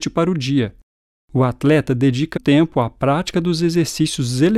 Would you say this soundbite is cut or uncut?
cut